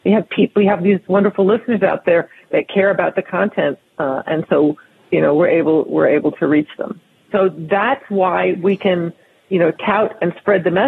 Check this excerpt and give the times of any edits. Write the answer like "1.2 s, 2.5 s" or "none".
7.3 s